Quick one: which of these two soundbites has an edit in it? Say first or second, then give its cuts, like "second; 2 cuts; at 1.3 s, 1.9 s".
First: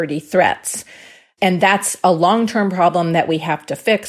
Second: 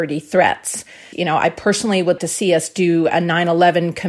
second; 2 cuts; at 1.1 s, 2.2 s